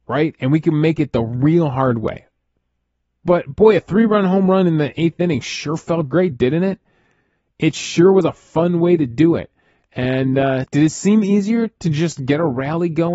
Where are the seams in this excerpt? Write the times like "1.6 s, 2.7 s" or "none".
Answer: 10.6 s